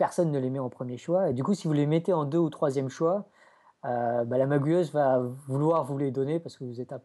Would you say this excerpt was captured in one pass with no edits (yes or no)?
yes